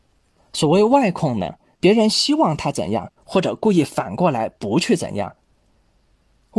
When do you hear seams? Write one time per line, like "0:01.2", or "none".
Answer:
0:01.7
0:03.2